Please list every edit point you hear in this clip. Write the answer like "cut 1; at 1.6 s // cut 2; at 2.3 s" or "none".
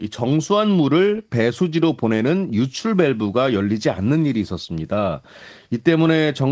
none